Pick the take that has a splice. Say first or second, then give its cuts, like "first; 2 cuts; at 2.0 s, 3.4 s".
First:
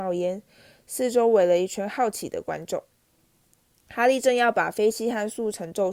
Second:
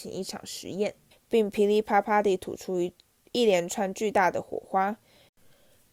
second; 1 cut; at 1.1 s